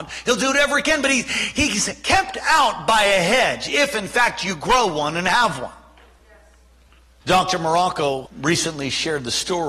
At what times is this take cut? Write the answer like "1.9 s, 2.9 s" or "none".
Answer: 7.2 s, 8.3 s